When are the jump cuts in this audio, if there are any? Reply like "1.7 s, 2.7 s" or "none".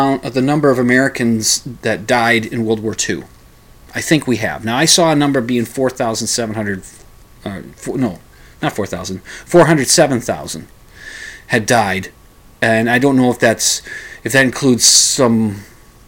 none